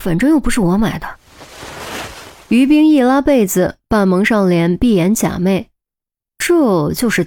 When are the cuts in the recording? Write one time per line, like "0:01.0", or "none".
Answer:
none